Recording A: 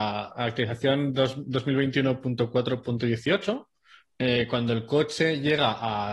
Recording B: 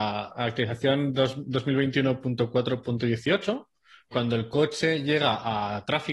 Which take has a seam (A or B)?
B